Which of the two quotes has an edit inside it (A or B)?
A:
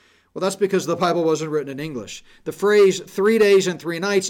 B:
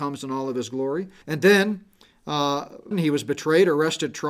B